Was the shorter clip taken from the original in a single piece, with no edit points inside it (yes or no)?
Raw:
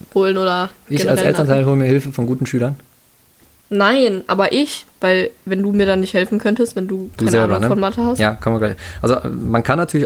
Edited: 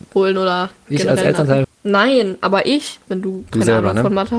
no